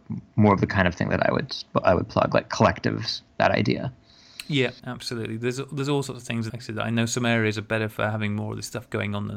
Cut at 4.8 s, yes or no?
yes